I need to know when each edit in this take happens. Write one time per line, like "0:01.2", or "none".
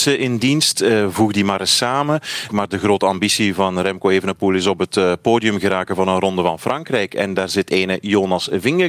0:02.5